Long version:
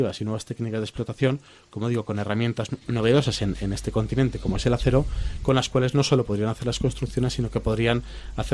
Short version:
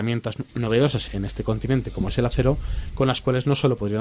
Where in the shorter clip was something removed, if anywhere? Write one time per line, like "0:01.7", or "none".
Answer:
0:01.1

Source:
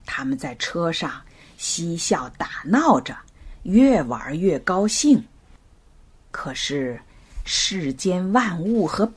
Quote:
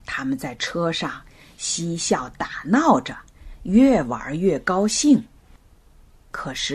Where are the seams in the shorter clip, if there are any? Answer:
none

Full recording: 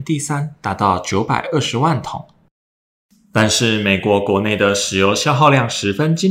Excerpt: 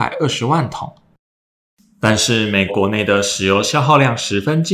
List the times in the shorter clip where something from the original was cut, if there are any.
0:02.7

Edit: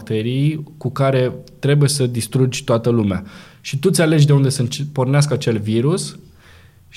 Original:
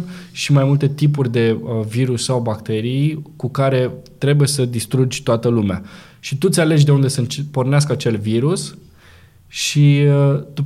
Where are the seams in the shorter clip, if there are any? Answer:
none

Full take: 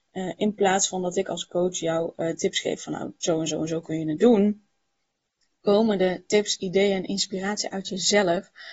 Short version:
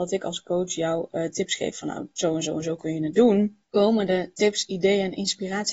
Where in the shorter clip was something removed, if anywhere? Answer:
0:03.6

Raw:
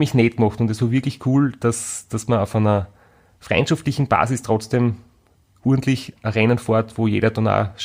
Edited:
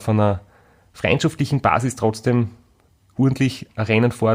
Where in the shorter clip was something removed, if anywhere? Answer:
none

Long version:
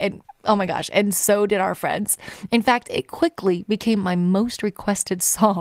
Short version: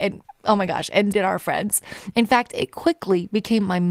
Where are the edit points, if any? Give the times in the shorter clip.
0:01.1

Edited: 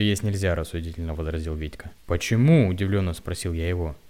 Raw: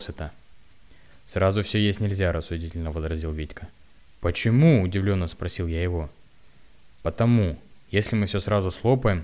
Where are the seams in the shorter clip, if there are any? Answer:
0:02.0

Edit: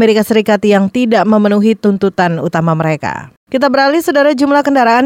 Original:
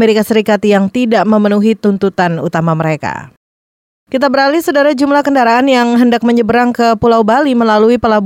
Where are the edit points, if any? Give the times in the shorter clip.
0:03.4

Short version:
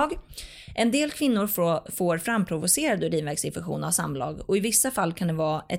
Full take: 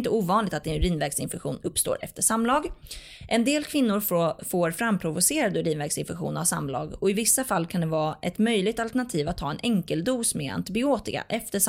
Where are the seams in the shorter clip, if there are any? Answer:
none

